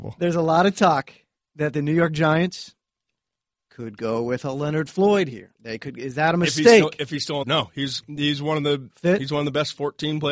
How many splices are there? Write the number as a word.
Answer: three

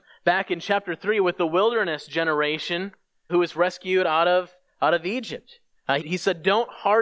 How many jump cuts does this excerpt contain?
two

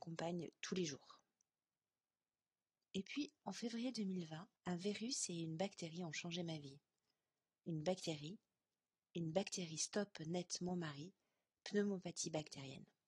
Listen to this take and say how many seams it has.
two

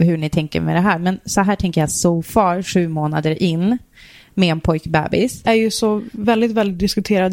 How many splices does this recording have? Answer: one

